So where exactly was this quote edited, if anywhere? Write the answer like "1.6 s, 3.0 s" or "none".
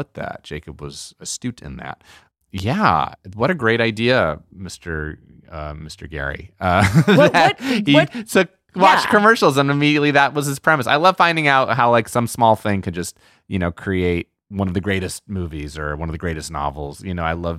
none